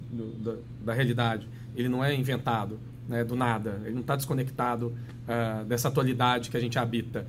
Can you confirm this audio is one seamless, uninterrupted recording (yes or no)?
yes